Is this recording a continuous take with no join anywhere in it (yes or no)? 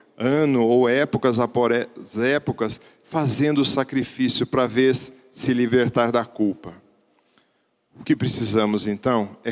yes